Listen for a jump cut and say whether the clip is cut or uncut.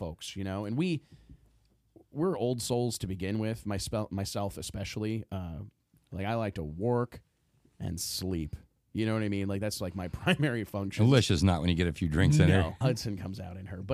cut